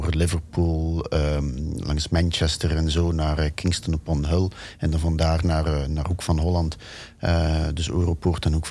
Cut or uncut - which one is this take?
uncut